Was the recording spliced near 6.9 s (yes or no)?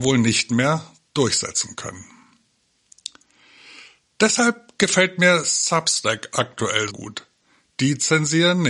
yes